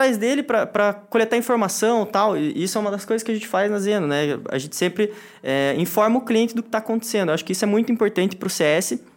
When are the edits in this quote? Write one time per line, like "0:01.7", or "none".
none